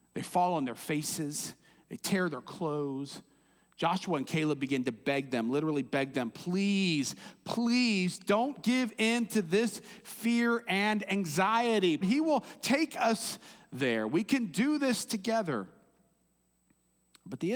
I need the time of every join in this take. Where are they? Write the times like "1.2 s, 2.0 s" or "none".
12.0 s